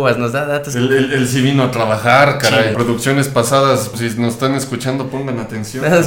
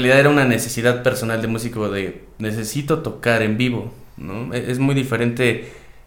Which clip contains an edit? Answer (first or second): first